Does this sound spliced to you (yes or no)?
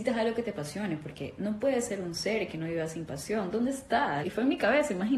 yes